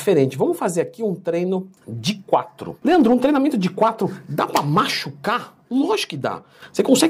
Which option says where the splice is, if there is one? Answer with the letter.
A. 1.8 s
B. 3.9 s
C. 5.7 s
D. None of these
A